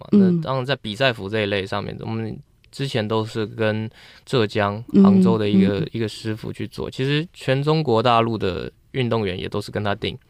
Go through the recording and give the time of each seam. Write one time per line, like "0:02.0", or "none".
none

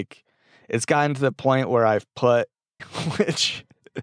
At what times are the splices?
0:02.8

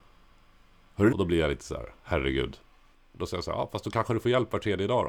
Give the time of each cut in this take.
0:01.1
0:02.9

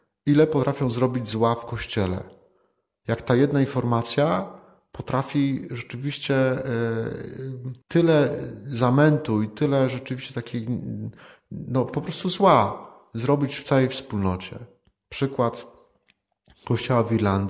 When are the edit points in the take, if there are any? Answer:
0:07.8

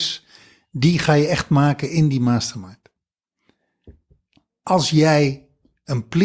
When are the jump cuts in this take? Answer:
none

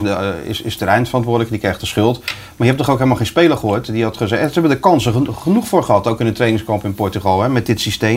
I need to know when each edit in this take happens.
none

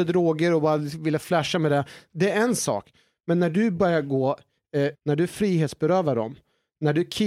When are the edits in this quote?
0:04.9

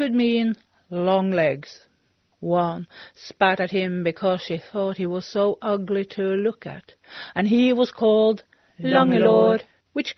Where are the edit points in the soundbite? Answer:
0:02.3
0:07.3

